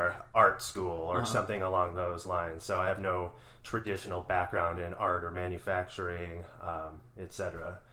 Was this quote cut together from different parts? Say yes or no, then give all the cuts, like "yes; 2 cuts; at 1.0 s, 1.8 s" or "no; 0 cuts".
no; 0 cuts